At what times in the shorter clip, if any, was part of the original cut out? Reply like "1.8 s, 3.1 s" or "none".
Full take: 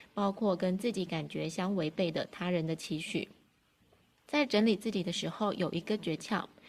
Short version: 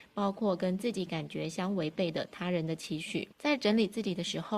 3.3 s